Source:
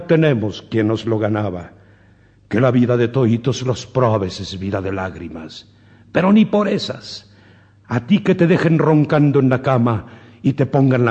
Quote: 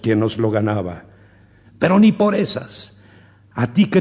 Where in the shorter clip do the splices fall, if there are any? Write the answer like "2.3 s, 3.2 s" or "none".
1.6 s